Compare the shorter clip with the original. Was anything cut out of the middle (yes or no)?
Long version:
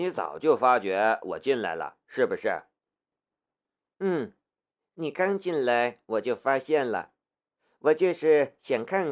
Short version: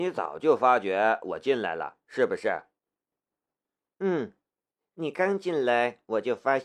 no